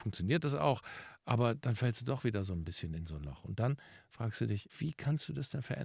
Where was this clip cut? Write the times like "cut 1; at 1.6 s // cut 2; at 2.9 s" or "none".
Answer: cut 1; at 4.7 s